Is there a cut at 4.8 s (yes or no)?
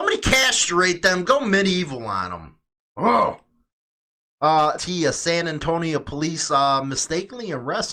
yes